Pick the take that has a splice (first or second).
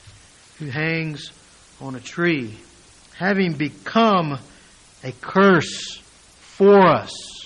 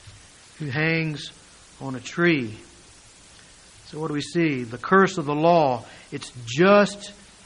first